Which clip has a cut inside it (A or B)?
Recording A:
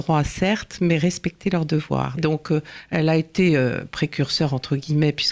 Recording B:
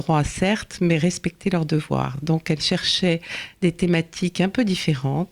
A